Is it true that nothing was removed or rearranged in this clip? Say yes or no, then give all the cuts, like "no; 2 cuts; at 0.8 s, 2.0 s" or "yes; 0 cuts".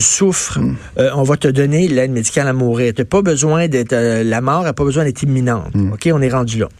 yes; 0 cuts